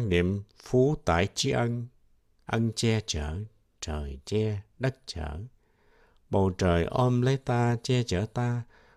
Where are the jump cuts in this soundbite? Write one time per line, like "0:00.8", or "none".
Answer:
none